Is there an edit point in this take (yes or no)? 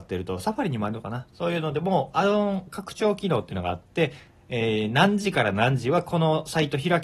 no